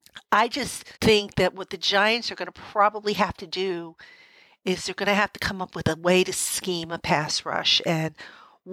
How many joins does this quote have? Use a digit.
1